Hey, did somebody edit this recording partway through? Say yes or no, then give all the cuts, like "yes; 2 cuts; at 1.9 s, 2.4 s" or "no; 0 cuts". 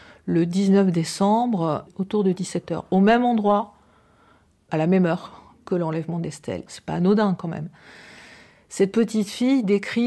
yes; 1 cut; at 6.7 s